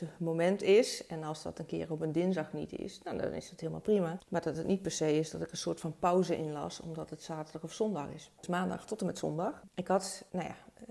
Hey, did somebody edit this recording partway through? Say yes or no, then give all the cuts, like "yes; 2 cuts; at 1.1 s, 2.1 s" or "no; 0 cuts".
yes; 2 cuts; at 8.4 s, 9.7 s